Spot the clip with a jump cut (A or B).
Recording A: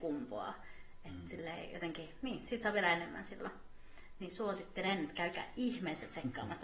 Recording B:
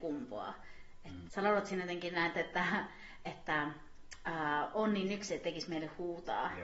B